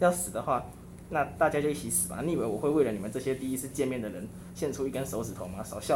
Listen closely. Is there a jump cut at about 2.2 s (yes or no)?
no